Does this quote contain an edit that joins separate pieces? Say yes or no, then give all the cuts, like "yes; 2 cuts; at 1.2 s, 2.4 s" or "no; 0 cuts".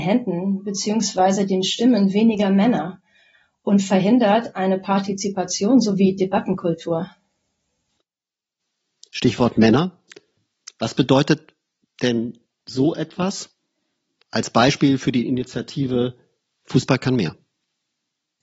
no; 0 cuts